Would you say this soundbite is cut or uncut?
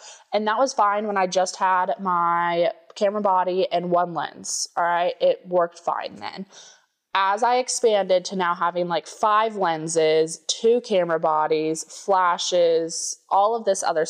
uncut